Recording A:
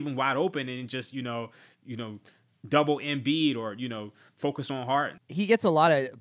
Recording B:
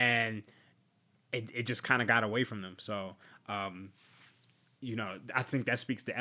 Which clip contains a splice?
A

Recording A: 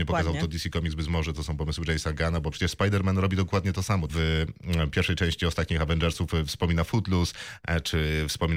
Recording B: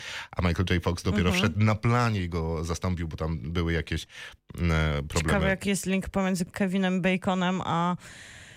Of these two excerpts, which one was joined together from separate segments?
A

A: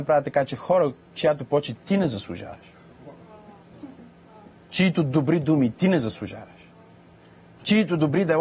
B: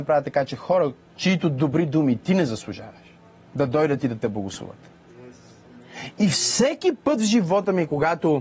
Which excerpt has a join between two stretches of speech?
B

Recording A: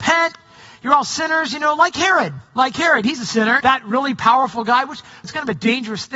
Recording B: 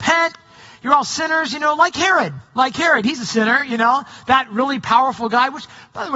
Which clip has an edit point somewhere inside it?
A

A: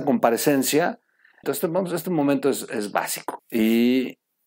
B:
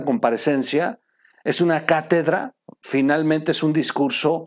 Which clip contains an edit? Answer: A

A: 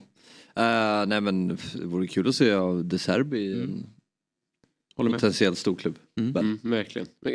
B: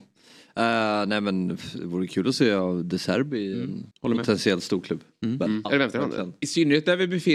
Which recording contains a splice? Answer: B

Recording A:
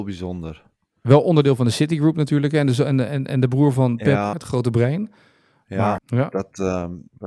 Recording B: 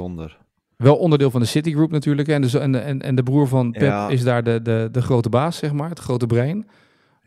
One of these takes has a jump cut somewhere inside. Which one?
A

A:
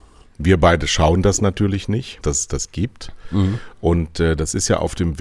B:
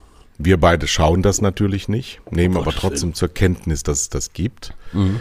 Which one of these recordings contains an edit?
A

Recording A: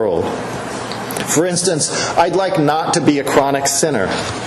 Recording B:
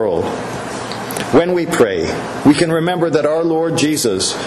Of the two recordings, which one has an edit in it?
B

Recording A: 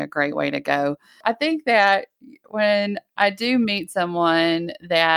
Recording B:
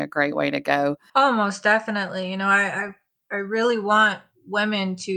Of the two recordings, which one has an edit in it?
B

